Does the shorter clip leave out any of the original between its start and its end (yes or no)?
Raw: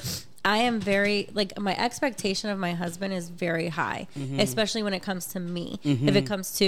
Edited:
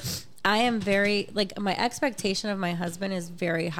no